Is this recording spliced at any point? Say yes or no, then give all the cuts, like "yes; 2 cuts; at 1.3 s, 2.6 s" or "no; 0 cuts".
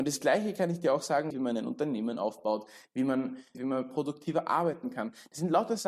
yes; 2 cuts; at 1.3 s, 3.5 s